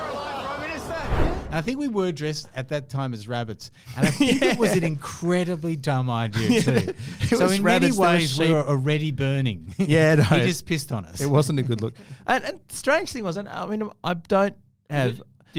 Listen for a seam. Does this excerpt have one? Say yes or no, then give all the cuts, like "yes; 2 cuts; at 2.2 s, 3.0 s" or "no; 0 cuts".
no; 0 cuts